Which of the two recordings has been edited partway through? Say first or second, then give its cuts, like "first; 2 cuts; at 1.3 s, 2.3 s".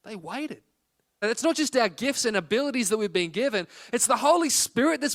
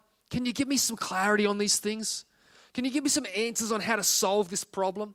first; 1 cut; at 1.2 s